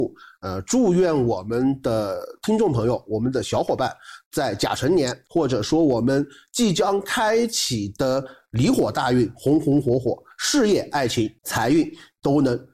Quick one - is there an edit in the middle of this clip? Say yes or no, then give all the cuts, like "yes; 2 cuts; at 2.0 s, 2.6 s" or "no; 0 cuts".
no; 0 cuts